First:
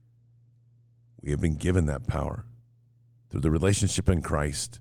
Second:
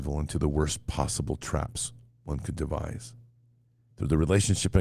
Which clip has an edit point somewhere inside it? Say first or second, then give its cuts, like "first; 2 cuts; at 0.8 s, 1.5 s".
second; 1 cut; at 3.9 s